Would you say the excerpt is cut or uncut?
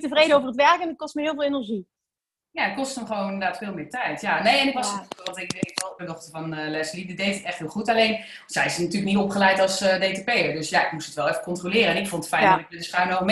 cut